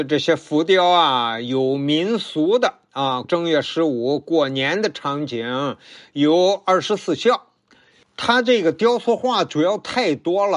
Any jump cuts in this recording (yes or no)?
yes